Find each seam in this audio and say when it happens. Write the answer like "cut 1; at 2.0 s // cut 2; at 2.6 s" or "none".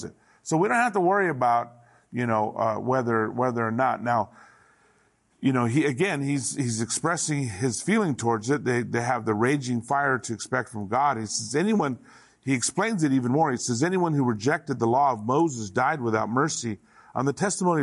none

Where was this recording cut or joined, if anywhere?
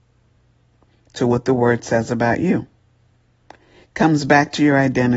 none

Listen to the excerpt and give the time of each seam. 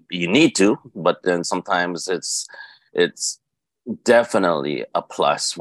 none

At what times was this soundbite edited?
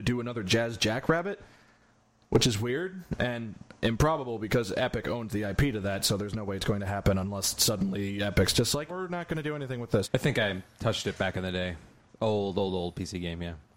cut 1; at 8.9 s // cut 2; at 10.0 s

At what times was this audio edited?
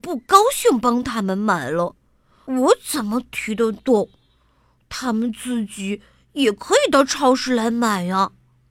none

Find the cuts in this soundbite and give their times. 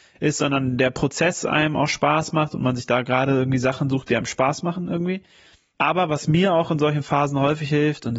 none

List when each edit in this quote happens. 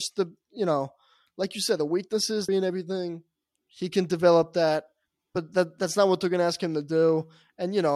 cut 1; at 2.5 s

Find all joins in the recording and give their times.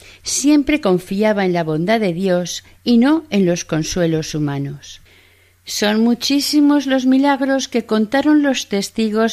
none

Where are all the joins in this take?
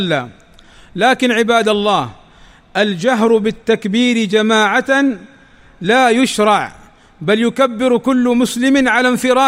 none

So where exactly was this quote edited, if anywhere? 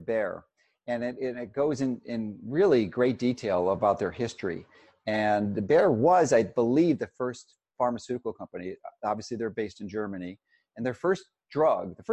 none

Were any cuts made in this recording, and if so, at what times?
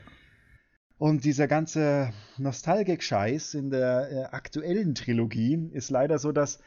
none

